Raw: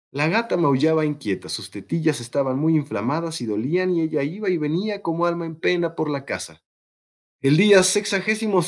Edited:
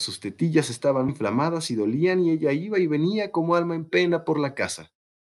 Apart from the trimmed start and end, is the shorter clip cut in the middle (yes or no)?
yes